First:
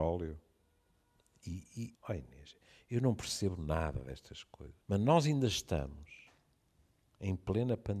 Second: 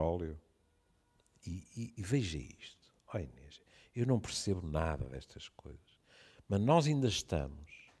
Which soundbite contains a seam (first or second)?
first